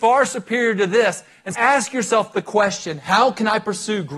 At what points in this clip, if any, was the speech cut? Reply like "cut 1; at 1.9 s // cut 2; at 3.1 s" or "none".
cut 1; at 1.5 s